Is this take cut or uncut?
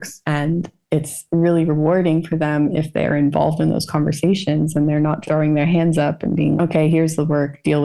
cut